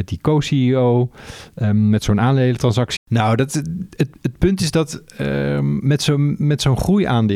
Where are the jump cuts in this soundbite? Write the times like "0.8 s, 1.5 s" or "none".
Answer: 3.0 s, 4.1 s